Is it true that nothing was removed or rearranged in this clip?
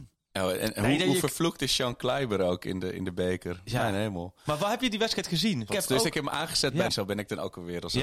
no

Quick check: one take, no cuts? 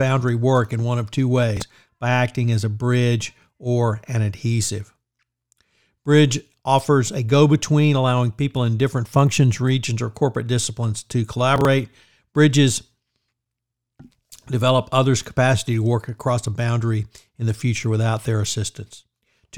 yes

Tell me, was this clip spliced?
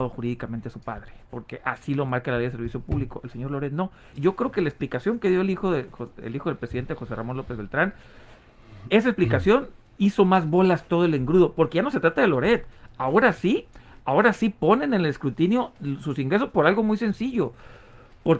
yes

